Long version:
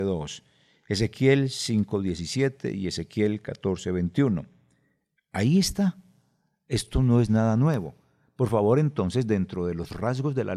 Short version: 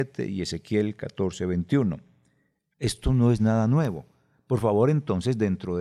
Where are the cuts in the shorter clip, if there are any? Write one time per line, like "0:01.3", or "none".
0:02.7